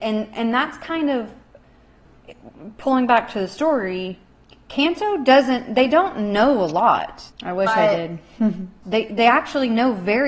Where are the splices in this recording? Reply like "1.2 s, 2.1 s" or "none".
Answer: 7.3 s, 8.8 s